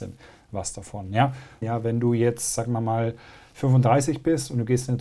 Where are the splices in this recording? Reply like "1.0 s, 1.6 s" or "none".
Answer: 1.6 s